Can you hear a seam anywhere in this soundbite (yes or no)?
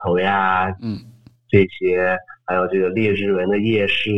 no